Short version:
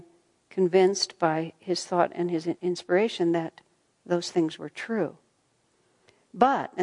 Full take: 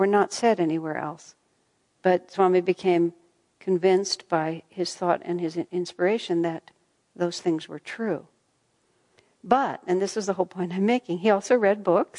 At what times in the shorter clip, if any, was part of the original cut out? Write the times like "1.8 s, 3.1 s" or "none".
none

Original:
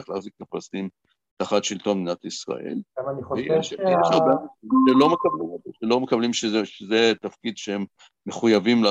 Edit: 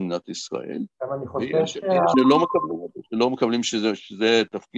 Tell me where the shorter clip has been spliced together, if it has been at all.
2.1 s

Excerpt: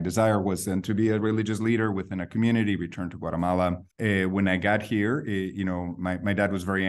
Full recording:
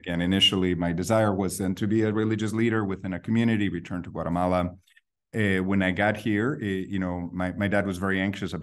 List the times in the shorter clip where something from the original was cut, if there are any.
3.9 s

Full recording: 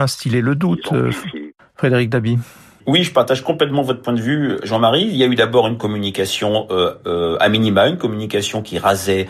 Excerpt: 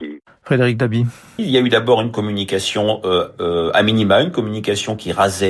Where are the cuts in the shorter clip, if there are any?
1.4 s

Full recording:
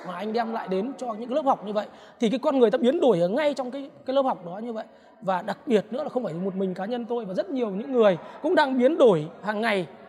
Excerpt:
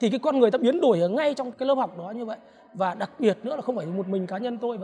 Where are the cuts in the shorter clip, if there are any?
1.5 s

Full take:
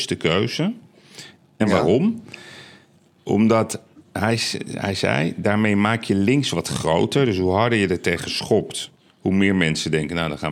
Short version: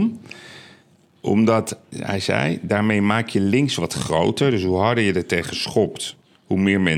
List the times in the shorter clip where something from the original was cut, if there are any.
1.9 s

